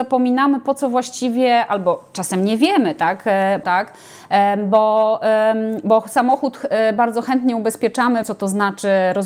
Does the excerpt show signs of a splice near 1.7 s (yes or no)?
no